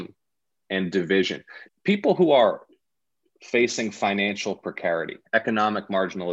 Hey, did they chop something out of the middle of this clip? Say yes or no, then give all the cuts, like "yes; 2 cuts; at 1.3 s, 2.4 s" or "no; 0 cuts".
yes; 1 cut; at 1.7 s